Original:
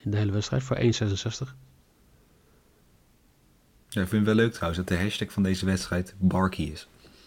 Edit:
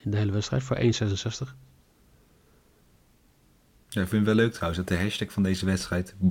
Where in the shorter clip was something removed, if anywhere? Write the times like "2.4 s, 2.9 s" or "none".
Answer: none

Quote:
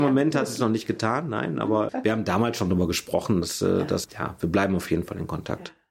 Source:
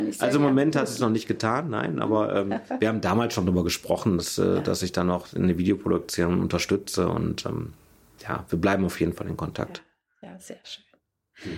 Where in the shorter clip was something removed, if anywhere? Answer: 1.9 s, 4.0 s

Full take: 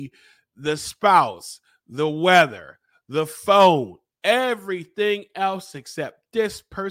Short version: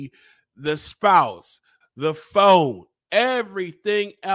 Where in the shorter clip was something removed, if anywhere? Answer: 1.8 s

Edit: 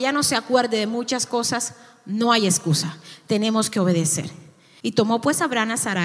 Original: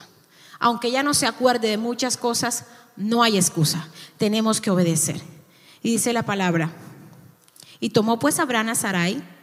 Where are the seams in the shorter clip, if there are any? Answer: 4.8 s

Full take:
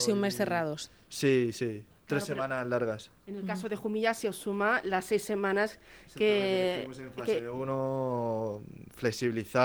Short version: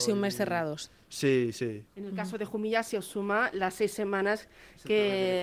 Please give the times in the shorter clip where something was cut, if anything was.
1.9 s

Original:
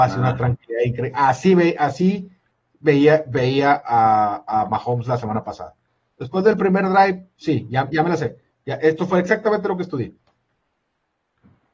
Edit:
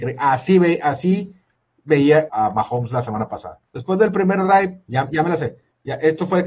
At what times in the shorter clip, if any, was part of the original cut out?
2.3 s, 3.7 s, 4.9 s

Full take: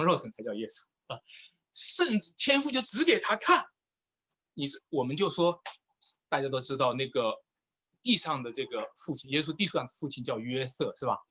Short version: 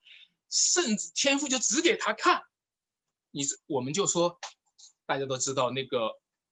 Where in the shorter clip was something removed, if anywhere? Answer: none

